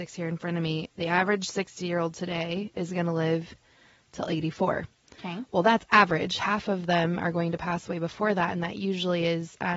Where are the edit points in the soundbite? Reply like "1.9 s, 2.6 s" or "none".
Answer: none